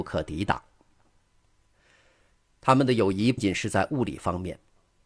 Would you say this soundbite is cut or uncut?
cut